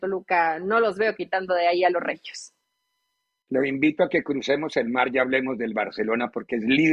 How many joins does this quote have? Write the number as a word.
one